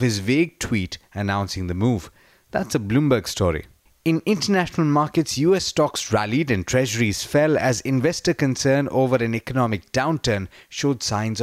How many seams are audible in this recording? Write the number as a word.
zero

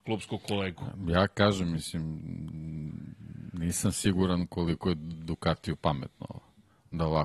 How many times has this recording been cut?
zero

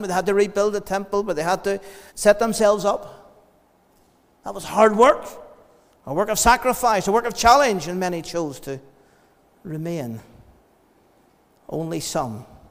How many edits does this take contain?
one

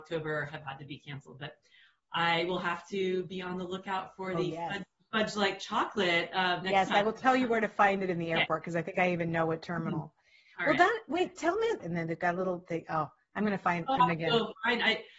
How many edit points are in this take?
two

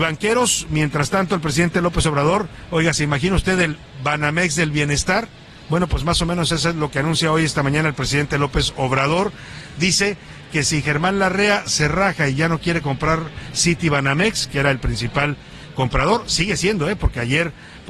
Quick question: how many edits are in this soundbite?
zero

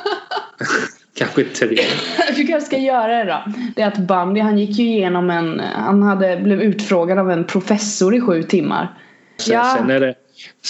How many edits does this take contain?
two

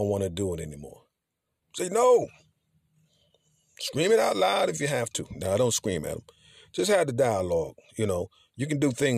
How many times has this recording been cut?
one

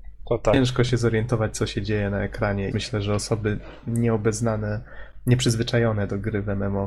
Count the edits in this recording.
one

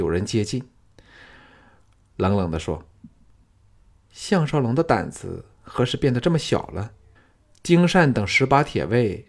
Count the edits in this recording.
two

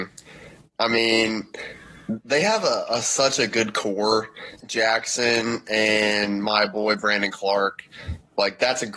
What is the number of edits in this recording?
one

